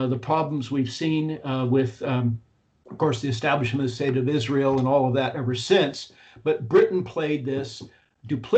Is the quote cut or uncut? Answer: uncut